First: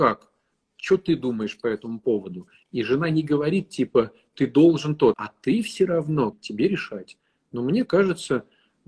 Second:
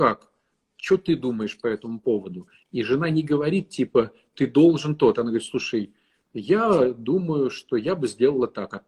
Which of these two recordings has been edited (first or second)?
first